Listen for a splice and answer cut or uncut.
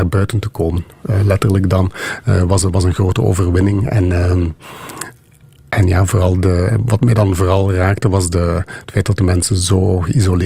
uncut